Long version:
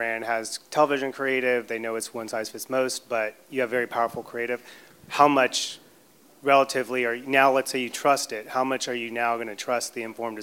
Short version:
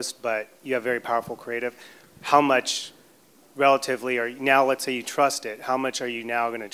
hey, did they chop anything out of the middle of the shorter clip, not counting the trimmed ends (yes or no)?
no